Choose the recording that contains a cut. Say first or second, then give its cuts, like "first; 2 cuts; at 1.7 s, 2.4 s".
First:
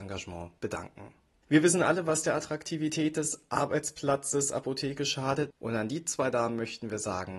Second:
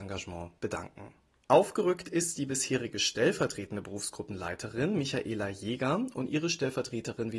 first; 2 cuts; at 1.3 s, 5.5 s